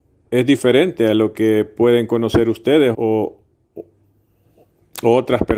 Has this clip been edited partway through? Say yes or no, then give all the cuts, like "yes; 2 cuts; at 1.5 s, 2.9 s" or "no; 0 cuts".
yes; 1 cut; at 2.9 s